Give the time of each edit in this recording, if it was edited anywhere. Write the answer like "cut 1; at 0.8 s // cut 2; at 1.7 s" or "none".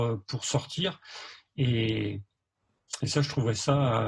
none